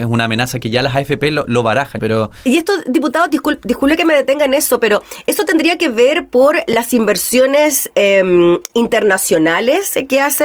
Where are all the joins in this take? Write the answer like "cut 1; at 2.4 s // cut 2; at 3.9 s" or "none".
cut 1; at 2.0 s